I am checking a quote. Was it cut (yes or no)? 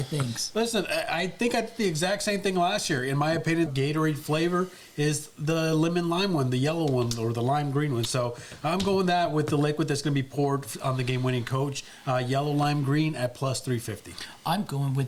yes